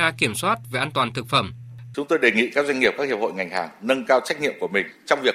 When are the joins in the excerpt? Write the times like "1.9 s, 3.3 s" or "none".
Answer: 1.9 s